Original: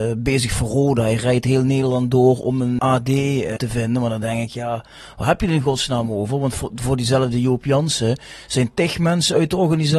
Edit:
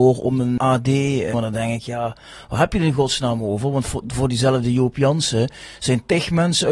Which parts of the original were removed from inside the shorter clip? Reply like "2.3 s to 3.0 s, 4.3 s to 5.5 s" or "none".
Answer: 3.5 s to 4.0 s